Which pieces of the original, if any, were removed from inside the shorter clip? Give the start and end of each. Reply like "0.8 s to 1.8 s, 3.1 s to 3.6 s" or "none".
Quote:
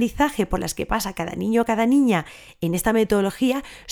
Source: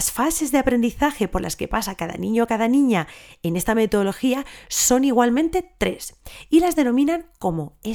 none